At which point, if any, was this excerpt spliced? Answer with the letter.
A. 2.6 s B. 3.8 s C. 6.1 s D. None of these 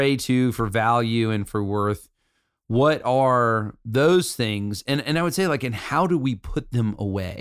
B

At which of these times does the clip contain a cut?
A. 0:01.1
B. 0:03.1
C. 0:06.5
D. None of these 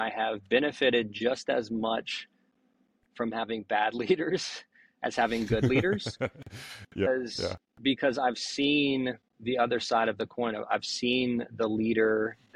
D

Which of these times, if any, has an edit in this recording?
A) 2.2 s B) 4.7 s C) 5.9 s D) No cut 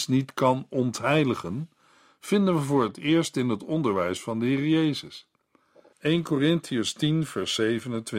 C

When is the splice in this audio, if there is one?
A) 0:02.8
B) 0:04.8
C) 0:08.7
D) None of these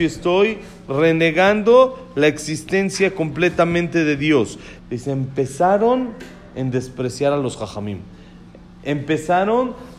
B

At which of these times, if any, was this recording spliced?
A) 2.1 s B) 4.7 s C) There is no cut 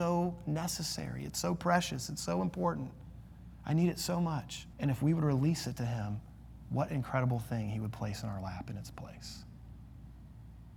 B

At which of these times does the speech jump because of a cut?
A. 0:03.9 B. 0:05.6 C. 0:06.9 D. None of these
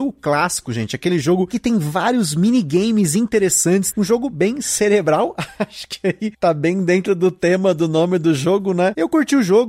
A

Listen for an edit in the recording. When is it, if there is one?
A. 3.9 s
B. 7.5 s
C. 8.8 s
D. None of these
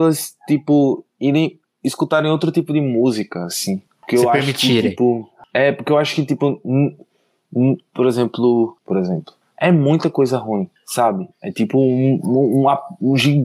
C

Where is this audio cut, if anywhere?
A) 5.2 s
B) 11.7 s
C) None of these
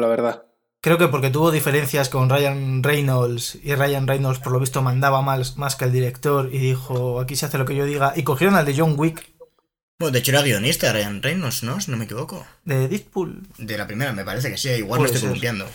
C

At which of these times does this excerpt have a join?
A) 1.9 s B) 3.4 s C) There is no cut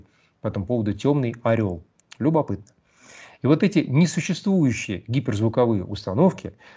C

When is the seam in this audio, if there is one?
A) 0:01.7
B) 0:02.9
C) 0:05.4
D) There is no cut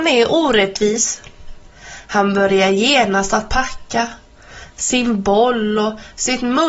A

